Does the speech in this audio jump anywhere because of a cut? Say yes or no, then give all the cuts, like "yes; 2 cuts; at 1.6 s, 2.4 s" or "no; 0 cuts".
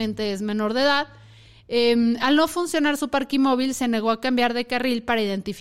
no; 0 cuts